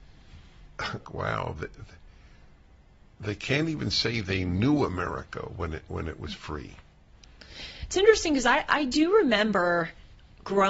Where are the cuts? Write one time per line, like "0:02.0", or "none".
0:01.1